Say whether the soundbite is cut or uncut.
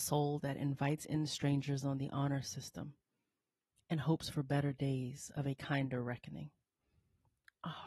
uncut